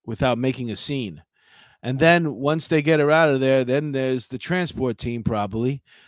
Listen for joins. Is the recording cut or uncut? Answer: uncut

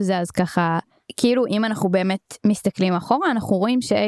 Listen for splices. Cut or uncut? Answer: uncut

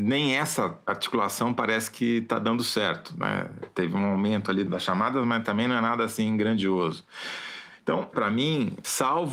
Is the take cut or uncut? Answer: cut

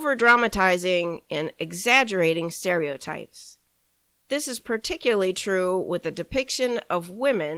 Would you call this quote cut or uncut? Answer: uncut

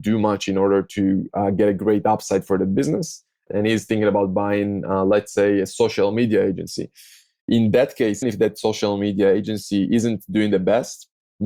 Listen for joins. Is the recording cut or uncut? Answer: cut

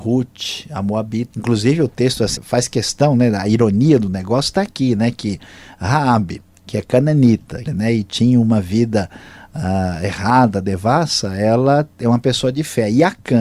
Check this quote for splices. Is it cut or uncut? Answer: cut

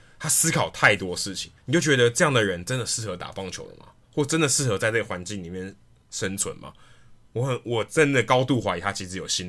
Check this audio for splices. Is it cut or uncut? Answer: cut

